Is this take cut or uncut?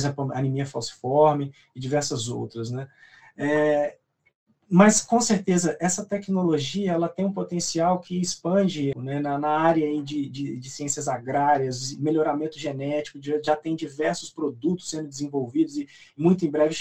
cut